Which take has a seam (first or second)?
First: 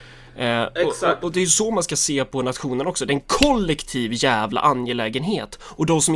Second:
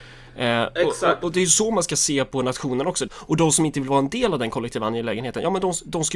second